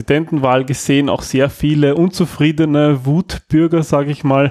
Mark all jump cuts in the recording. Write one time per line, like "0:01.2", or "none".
none